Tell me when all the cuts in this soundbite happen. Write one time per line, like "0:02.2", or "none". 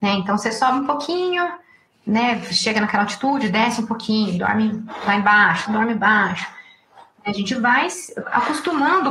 0:05.7